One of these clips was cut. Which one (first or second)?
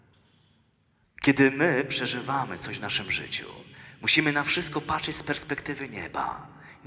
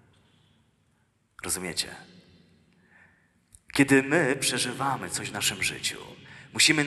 first